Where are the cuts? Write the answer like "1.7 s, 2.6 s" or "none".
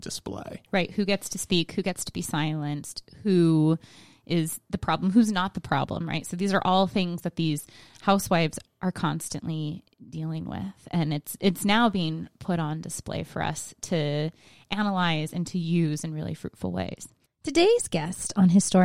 none